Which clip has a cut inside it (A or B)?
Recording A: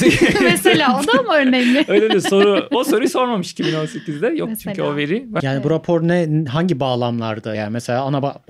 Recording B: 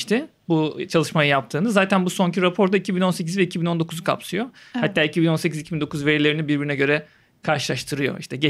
A